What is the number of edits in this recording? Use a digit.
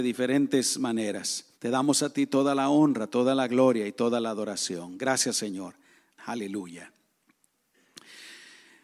2